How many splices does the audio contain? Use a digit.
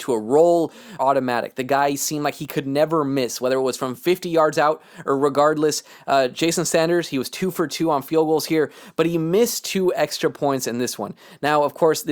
1